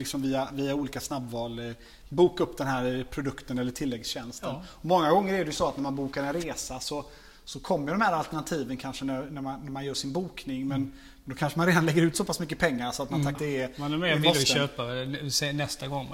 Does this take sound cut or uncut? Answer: cut